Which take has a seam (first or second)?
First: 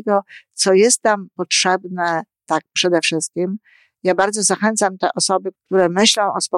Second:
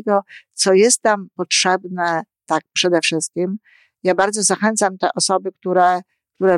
first